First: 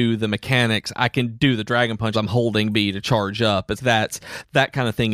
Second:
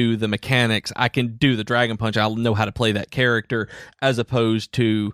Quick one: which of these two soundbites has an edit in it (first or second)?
first